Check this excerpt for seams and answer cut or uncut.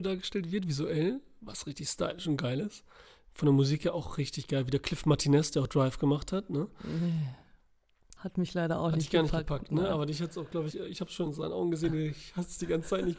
cut